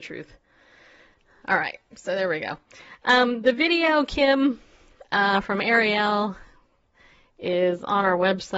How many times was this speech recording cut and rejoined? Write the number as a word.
zero